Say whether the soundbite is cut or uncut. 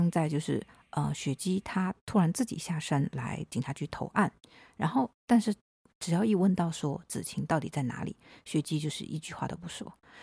uncut